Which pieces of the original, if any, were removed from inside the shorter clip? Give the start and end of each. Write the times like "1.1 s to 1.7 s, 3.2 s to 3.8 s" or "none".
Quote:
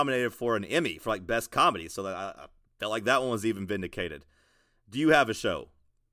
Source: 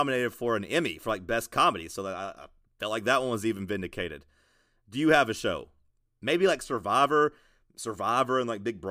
none

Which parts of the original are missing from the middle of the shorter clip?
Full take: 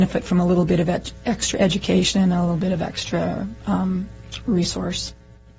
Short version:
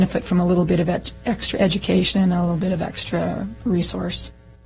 3.6 s to 4.4 s

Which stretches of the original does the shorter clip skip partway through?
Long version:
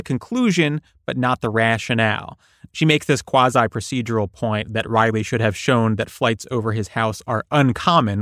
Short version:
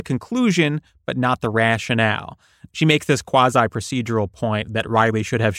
none

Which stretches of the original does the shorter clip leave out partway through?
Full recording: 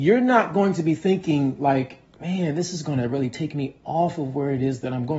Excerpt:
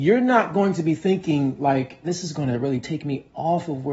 2.0 s to 2.5 s

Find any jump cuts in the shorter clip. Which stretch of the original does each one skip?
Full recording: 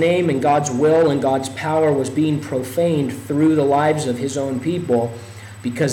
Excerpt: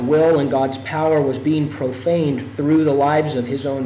none

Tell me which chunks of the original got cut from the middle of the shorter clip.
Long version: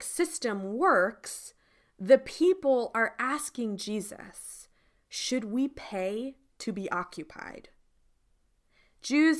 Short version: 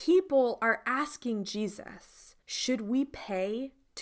4.7 s to 5.0 s

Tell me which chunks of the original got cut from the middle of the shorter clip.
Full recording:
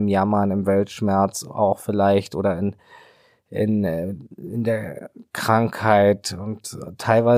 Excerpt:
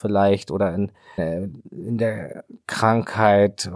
3.0 s to 3.8 s

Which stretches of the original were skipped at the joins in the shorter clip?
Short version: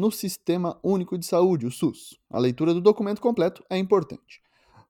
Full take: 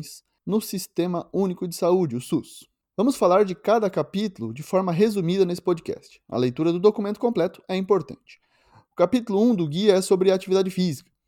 2.7 s to 6.2 s

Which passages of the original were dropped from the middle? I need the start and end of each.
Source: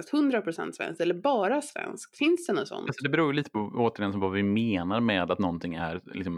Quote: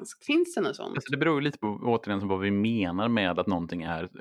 none

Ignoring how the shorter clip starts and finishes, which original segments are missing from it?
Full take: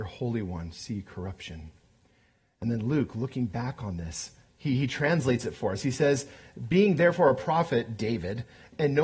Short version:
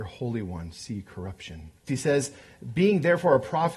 1.9 s to 5.8 s

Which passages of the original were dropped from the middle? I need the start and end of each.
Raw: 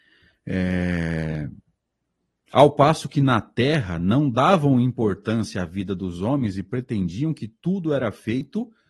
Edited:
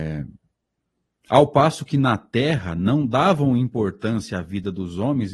none

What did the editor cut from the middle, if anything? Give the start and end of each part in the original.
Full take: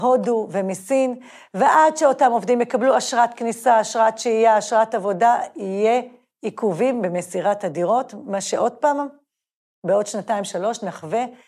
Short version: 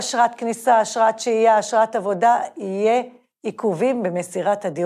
none

